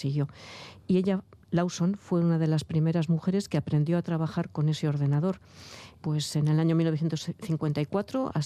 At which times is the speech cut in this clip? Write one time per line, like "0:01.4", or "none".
0:06.0